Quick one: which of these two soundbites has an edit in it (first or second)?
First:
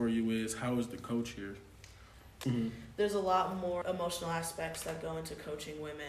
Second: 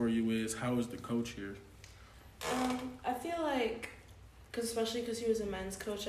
first